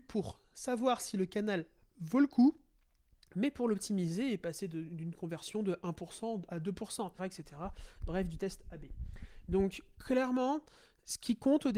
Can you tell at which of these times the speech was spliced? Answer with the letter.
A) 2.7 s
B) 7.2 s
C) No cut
B